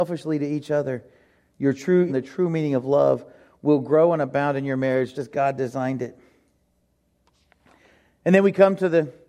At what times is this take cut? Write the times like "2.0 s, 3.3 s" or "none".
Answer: 2.1 s, 5.1 s